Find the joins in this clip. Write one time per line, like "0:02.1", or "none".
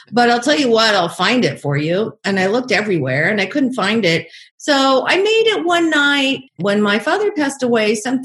0:04.5
0:06.5